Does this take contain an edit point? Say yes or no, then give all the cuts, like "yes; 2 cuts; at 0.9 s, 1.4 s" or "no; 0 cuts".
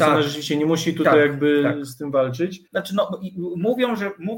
yes; 1 cut; at 2.7 s